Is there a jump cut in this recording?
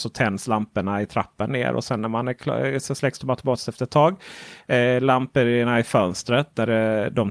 no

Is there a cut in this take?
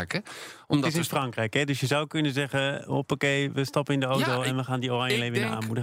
no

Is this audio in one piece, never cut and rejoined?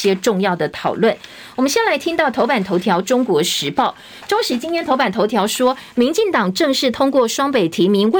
yes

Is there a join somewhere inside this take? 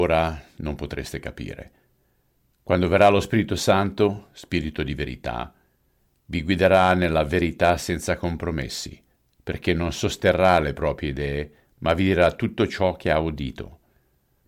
no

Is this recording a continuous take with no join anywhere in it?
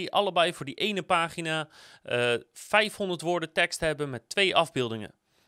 yes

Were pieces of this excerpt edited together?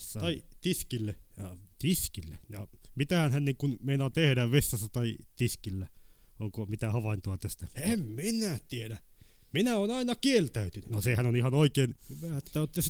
no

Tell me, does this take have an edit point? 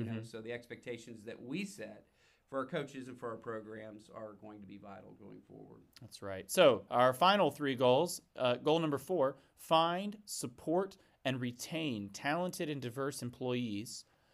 no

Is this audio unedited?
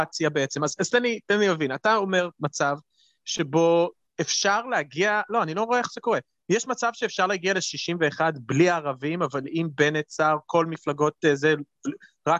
yes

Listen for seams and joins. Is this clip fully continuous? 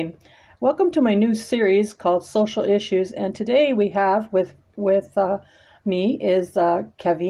yes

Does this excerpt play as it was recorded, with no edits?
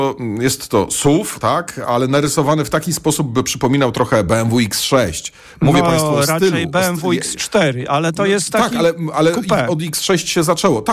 yes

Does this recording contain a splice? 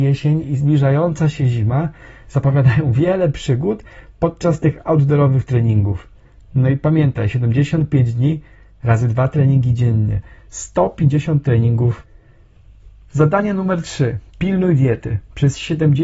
no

